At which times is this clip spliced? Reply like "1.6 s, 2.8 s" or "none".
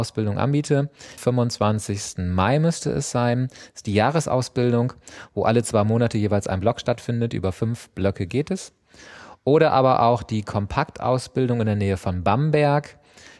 1.2 s